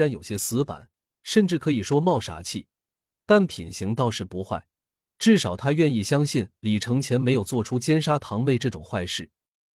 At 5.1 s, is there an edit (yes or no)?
no